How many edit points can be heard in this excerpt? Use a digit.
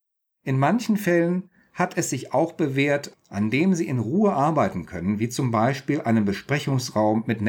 1